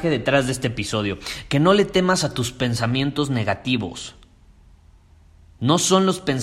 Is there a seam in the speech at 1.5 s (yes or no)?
no